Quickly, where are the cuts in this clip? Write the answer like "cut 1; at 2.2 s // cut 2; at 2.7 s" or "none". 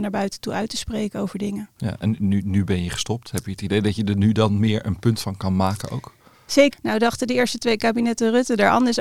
cut 1; at 6.7 s